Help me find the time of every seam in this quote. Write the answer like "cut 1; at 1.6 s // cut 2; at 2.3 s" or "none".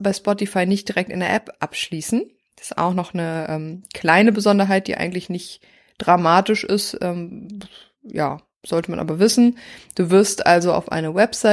none